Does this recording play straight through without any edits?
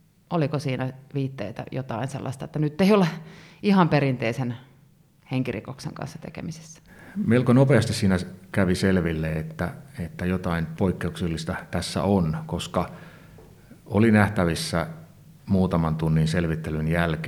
yes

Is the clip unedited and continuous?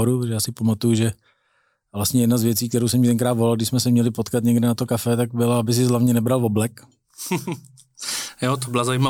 yes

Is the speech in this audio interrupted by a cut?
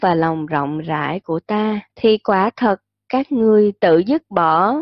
yes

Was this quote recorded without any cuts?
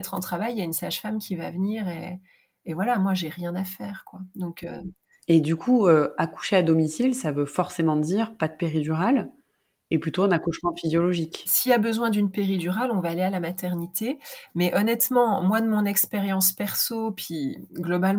no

